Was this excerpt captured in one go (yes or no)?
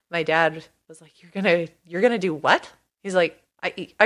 yes